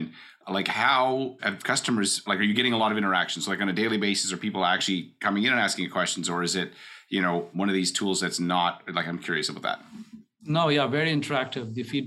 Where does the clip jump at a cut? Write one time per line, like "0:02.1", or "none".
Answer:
none